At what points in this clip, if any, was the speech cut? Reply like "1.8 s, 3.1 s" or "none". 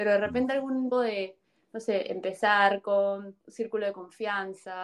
0.9 s, 3.4 s

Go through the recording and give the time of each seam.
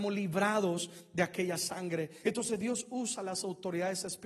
2.2 s

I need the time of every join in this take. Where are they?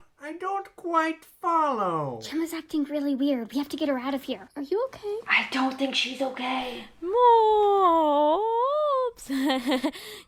4.5 s

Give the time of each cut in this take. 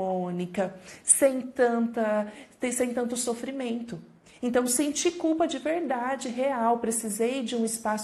none

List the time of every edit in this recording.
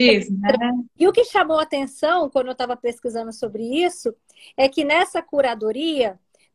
1.0 s

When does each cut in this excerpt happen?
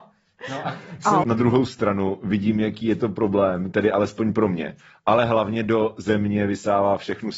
1.2 s

